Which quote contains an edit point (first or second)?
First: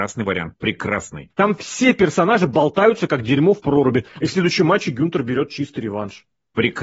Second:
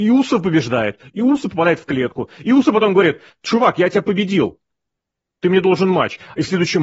first